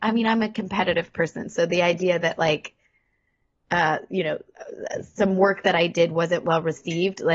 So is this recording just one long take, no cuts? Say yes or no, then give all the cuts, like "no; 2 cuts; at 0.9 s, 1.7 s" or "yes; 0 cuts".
yes; 0 cuts